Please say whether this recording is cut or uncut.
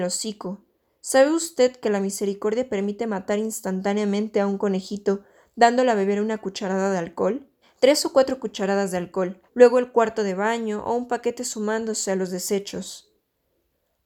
cut